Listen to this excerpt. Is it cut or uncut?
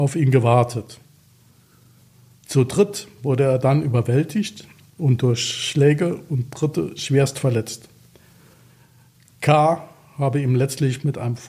uncut